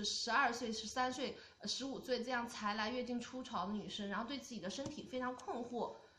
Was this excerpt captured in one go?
yes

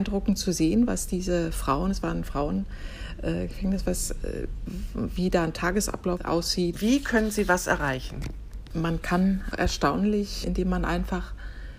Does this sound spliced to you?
yes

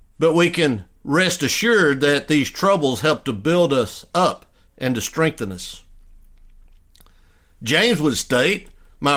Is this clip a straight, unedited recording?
yes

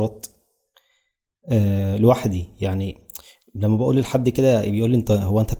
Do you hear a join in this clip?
no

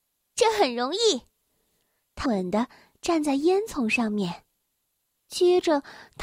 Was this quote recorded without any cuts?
no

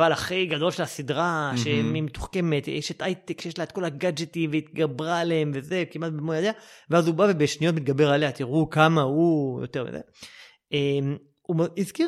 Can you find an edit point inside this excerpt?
no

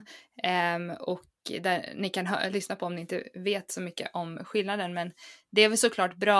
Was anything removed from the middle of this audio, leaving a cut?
no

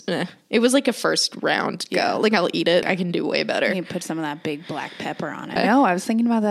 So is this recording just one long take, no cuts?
no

